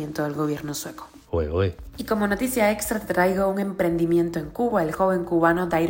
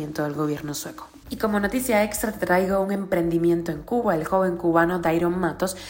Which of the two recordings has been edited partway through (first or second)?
second